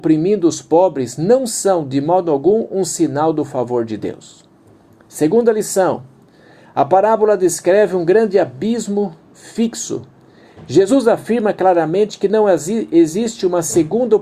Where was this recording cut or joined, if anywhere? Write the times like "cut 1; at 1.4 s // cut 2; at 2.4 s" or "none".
none